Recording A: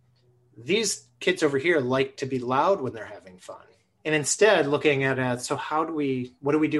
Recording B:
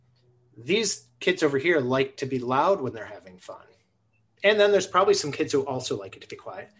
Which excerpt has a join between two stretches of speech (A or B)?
A